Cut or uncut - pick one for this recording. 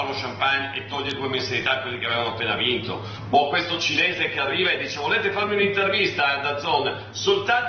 uncut